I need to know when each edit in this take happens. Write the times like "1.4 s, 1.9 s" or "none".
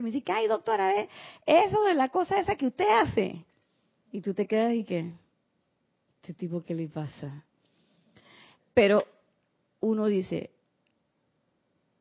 none